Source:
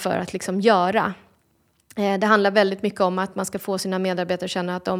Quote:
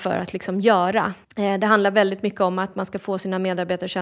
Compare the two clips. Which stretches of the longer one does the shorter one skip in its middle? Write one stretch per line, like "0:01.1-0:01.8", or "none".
0:01.2-0:01.8